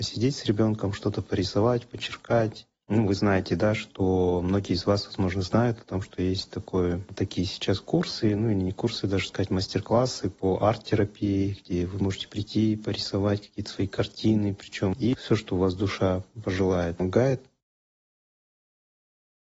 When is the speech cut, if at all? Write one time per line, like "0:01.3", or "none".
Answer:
none